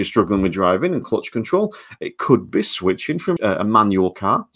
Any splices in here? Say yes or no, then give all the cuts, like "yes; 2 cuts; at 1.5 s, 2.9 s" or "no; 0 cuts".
yes; 1 cut; at 3.4 s